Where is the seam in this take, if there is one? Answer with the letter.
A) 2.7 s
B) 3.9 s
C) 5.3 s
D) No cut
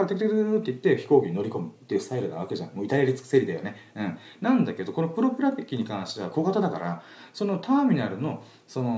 D